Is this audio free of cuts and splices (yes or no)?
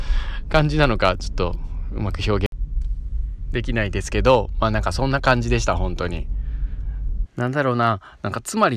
no